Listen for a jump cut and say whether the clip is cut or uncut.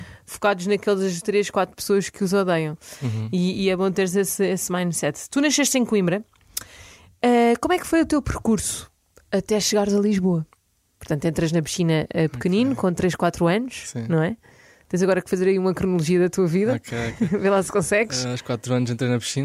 uncut